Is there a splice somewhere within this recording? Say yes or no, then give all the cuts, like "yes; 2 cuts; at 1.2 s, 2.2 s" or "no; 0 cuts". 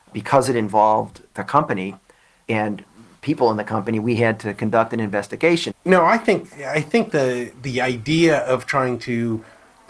yes; 1 cut; at 5.7 s